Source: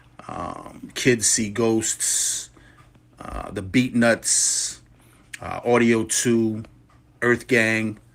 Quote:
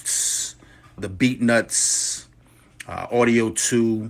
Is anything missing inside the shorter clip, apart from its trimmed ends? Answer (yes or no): yes